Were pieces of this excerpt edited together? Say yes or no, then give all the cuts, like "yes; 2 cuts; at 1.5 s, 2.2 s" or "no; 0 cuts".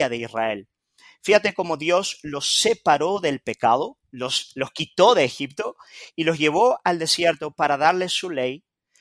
no; 0 cuts